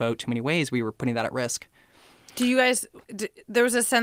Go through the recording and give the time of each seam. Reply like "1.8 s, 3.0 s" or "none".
3.0 s